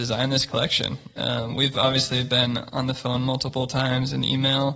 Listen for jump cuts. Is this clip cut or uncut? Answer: cut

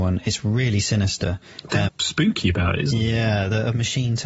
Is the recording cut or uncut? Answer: cut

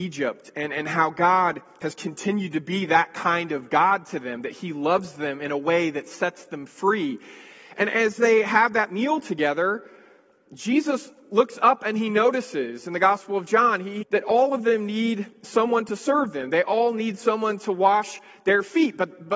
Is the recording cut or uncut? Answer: cut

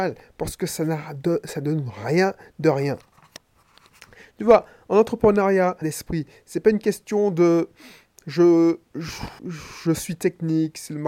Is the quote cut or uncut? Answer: cut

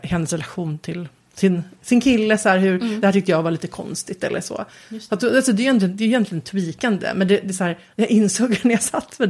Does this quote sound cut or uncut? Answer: uncut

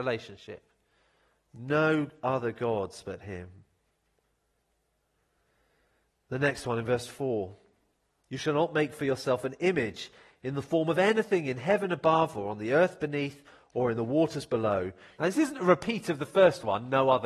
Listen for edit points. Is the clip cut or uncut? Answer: cut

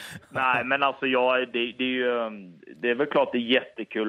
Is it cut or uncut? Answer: uncut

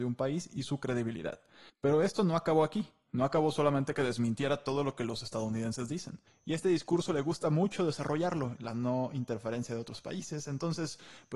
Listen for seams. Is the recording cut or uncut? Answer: cut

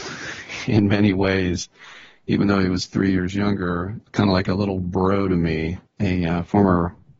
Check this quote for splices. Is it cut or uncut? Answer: cut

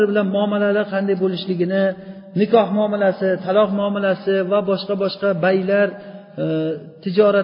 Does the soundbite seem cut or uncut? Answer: uncut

